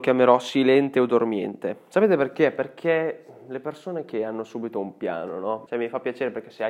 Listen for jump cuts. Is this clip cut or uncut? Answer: cut